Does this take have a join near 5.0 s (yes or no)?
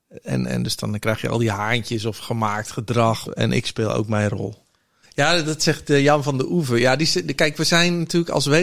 yes